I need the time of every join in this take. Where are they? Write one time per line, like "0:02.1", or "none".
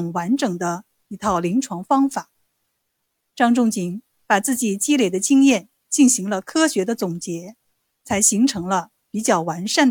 none